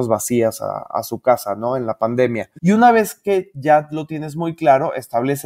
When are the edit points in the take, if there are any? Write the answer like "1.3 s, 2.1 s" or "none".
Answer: 2.6 s